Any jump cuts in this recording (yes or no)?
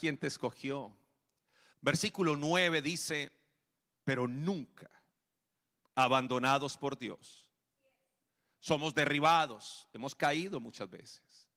yes